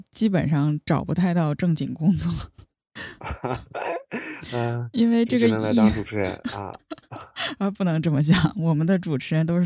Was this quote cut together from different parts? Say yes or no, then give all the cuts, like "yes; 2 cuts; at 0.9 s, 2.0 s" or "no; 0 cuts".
no; 0 cuts